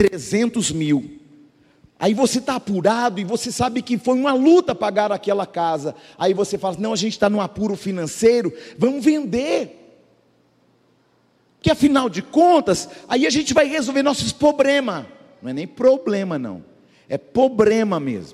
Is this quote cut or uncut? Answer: uncut